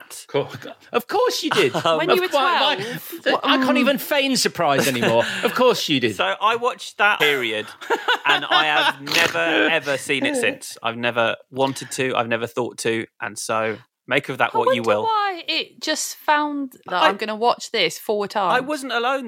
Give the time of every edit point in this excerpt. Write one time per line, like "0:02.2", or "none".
0:07.2
0:16.9